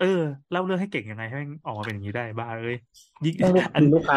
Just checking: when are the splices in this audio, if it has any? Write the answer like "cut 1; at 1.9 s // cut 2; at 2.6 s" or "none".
none